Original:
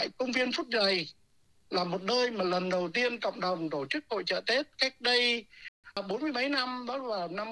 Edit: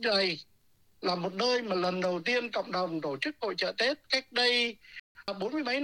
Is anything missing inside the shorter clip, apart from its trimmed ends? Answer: no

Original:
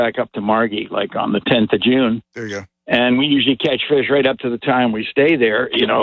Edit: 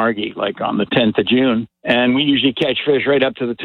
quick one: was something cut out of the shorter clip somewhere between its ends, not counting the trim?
yes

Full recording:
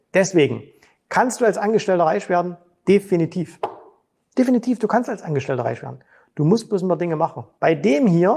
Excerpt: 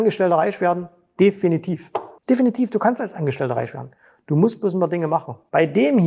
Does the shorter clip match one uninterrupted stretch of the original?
no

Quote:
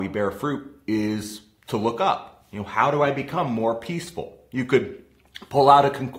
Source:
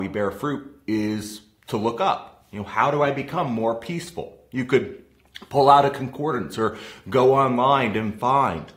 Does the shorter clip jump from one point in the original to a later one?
no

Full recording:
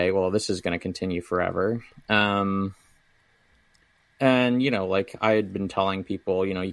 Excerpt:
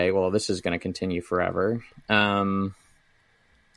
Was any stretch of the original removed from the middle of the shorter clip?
no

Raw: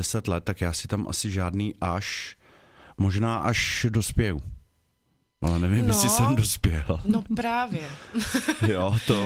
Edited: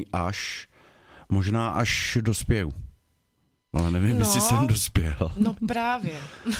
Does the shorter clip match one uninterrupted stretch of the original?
yes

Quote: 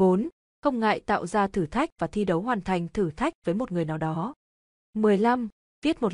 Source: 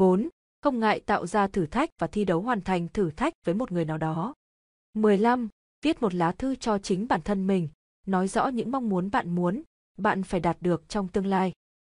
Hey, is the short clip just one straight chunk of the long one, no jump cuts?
yes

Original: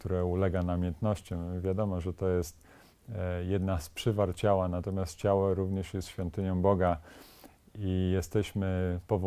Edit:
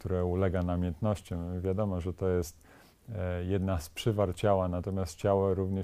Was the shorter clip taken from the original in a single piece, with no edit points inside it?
yes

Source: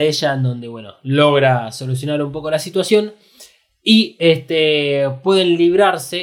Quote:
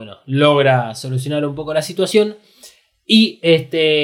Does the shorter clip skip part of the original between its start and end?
no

